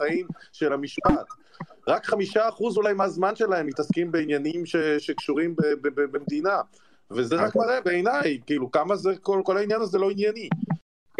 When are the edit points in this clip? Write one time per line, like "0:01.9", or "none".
0:09.2